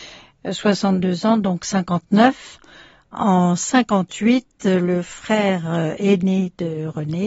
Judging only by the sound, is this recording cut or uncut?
uncut